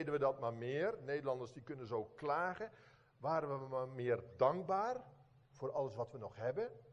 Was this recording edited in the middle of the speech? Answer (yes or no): no